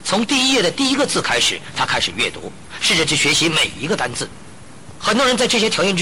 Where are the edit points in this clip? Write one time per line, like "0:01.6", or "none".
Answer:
0:05.0